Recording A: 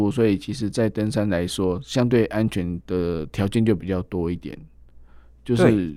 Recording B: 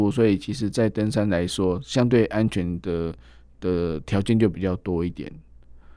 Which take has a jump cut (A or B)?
A